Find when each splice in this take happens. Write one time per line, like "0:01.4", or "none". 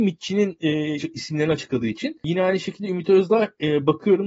0:01.0